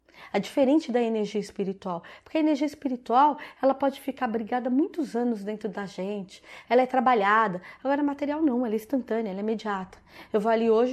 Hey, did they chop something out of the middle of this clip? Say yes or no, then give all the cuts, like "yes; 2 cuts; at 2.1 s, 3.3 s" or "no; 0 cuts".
yes; 1 cut; at 6.6 s